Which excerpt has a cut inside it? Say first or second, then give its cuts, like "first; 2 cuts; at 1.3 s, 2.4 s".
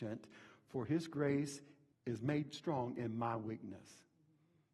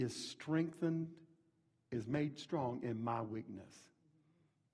first; 1 cut; at 1.9 s